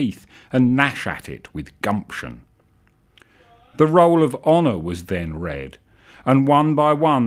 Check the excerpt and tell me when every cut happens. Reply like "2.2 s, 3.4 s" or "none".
none